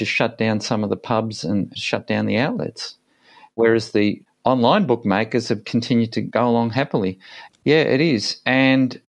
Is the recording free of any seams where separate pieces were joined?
no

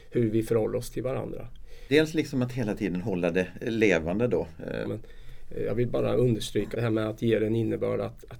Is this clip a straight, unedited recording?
no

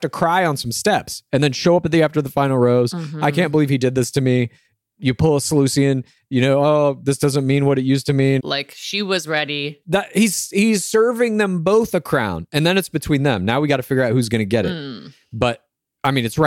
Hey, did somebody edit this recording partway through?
yes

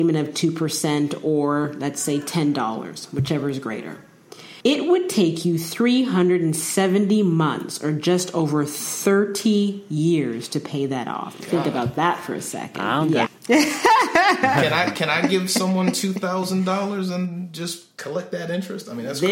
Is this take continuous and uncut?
no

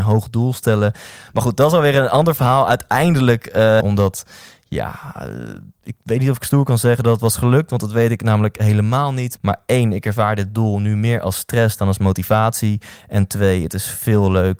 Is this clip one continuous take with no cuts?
no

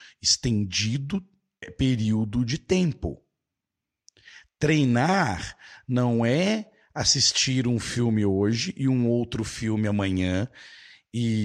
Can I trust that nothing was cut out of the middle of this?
no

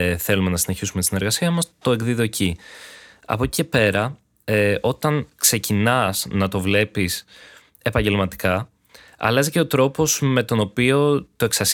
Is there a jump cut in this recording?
no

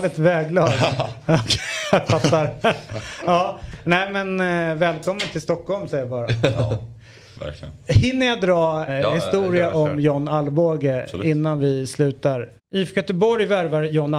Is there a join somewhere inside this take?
yes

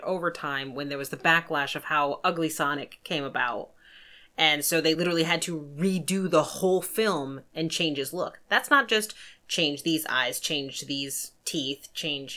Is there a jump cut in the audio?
no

